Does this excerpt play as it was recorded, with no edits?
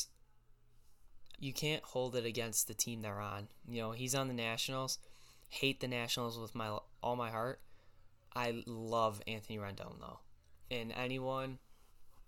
no; 2 cuts; at 1.4 s, 10.7 s

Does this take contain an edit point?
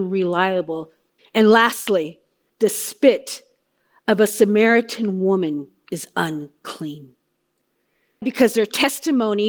yes; 3 cuts; at 1.2 s, 2.5 s, 8.2 s

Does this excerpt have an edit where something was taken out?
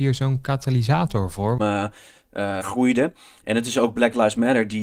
yes; 2 cuts; at 1.6 s, 2.6 s

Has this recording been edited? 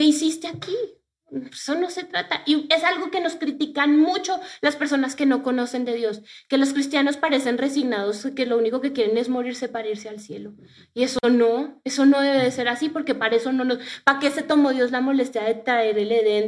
no; 0 cuts

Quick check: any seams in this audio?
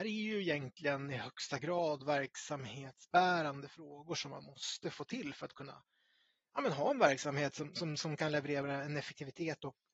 no; 0 cuts

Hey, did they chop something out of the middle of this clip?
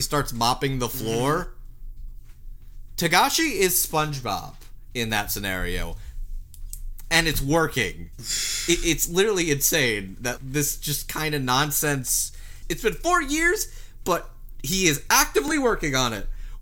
yes; 2 cuts; at 10.4 s, 12.6 s

